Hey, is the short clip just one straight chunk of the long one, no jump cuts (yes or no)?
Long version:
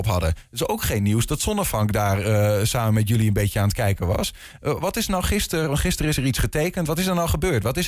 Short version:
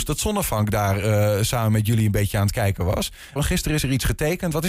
no